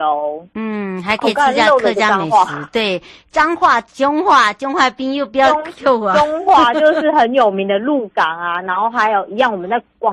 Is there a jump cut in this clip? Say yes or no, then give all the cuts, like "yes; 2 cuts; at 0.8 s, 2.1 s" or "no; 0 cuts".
no; 0 cuts